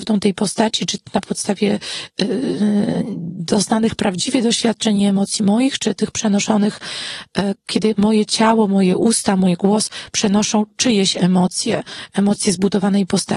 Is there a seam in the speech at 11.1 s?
no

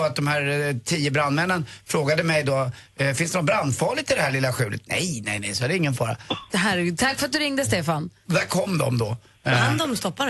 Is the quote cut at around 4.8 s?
no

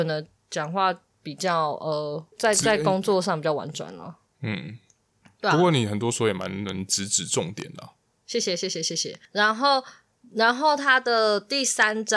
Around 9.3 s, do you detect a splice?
no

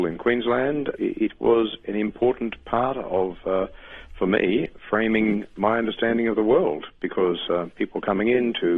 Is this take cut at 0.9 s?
yes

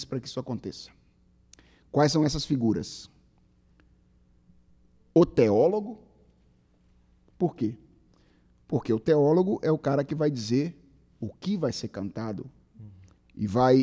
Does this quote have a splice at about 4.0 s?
no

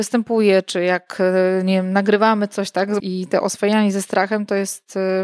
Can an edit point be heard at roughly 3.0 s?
yes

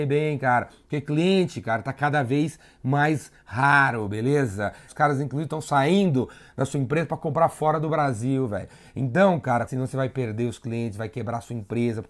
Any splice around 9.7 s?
yes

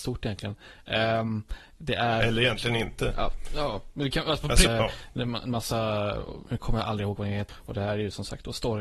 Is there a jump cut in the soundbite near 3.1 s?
no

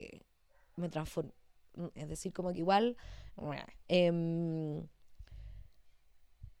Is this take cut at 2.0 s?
yes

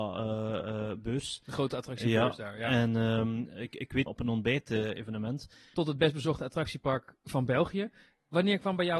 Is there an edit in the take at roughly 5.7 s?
yes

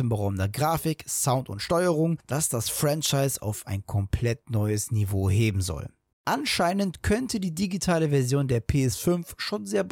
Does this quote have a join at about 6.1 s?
yes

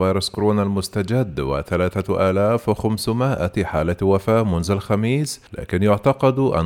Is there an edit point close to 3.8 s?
no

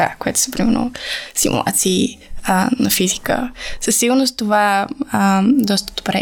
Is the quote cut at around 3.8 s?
no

